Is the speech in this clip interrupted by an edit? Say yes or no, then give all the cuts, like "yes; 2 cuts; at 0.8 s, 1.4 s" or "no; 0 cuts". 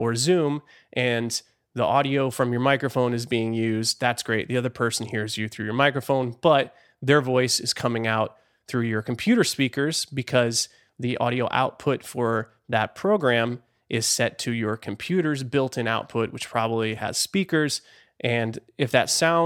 no; 0 cuts